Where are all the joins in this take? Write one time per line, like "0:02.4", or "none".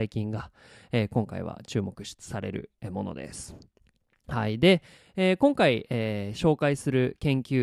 none